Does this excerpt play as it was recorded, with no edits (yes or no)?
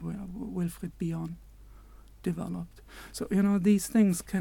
yes